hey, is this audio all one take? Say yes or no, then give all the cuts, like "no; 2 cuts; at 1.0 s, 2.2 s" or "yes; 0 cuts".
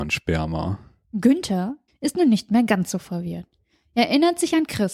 no; 1 cut; at 1.9 s